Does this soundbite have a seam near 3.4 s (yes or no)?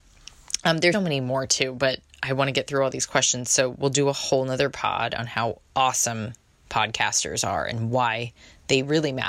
no